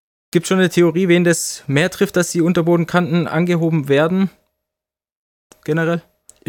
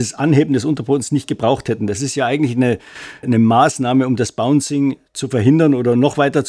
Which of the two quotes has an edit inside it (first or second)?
second